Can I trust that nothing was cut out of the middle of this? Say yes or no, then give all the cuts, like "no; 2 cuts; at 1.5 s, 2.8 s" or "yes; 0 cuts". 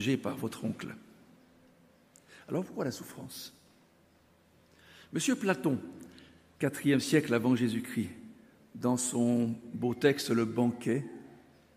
yes; 0 cuts